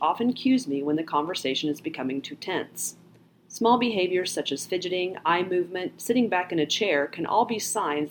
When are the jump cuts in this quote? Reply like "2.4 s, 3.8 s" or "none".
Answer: none